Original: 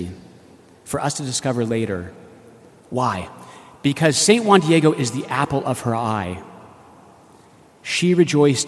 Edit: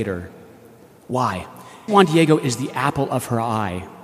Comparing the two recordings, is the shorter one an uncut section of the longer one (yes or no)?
no